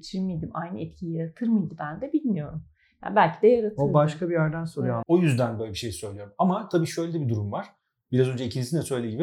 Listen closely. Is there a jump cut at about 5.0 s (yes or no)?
yes